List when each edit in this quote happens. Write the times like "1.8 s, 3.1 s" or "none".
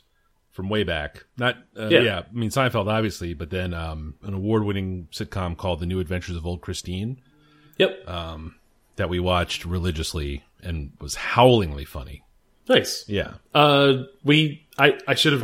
4.2 s